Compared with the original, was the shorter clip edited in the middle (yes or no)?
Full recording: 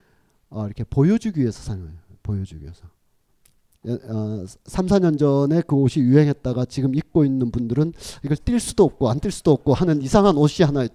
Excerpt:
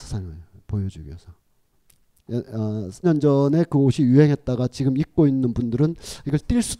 yes